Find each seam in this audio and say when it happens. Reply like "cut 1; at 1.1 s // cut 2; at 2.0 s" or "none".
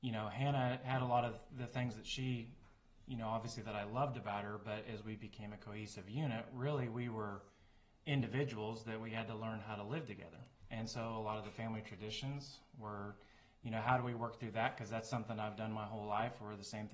none